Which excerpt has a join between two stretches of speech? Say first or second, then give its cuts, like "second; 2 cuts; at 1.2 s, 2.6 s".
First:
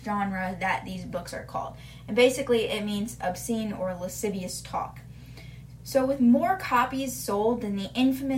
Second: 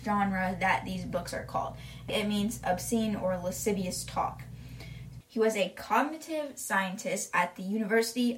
second; 2 cuts; at 2.1 s, 5.2 s